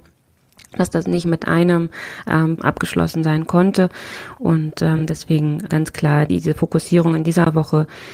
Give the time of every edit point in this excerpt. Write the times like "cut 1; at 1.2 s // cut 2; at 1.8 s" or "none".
cut 1; at 2.6 s